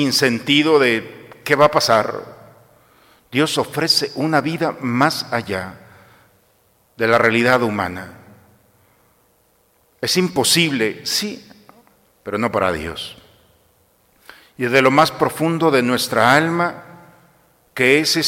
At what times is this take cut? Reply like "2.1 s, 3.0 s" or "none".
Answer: none